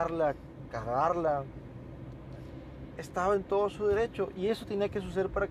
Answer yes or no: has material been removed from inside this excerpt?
yes